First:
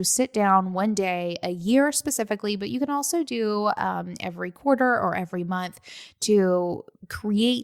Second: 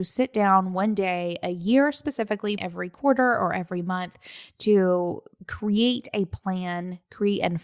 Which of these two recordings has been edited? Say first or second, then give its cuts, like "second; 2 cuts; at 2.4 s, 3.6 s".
second; 1 cut; at 2.6 s